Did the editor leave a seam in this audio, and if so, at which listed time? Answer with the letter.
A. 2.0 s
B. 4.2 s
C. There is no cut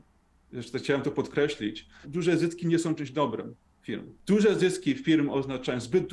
A